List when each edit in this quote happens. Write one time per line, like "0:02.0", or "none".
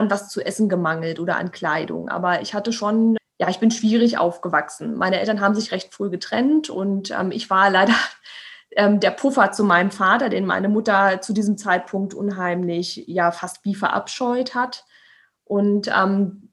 0:03.2